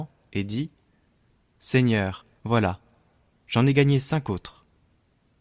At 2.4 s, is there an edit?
yes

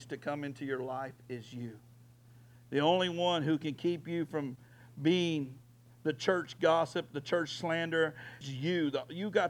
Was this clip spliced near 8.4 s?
yes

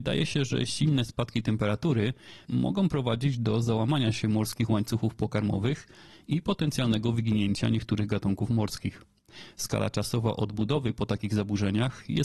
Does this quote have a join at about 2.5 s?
yes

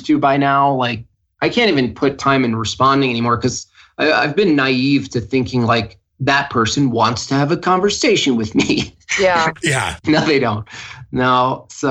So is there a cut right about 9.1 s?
no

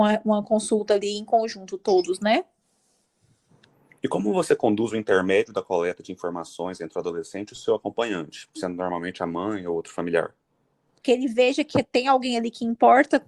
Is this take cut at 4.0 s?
yes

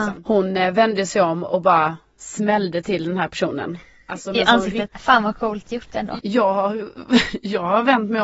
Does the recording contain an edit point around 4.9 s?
yes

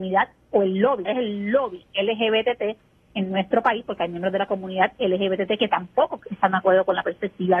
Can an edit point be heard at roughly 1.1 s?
yes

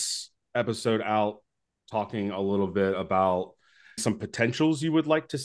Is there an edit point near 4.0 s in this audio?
yes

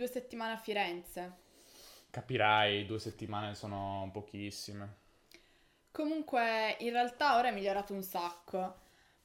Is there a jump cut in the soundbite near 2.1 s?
no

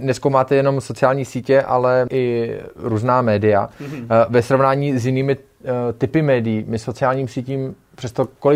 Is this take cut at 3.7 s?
no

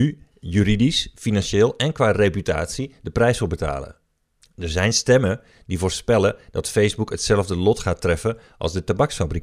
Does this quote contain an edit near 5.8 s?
no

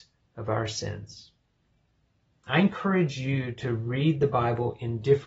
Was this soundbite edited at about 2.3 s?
yes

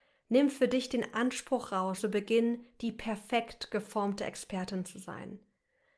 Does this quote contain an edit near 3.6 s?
no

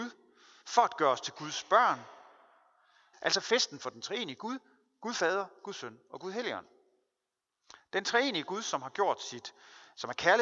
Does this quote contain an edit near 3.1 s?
yes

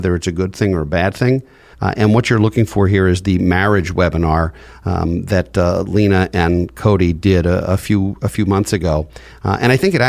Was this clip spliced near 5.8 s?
no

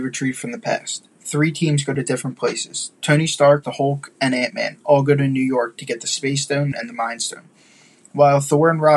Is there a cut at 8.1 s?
no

